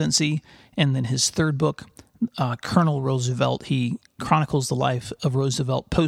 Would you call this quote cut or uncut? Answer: uncut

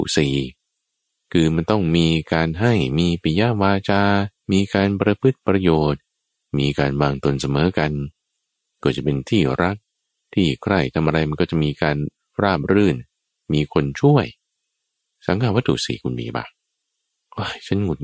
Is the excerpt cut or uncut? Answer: cut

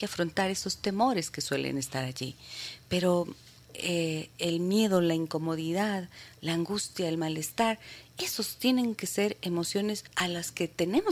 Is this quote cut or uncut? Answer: cut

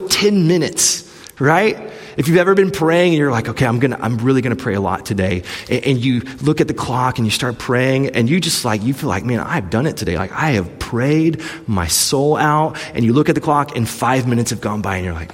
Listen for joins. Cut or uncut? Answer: uncut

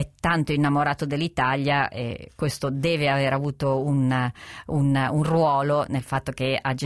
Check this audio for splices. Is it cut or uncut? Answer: uncut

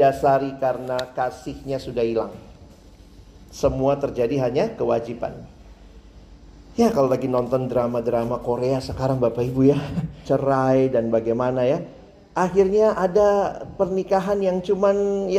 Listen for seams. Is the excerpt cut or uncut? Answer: cut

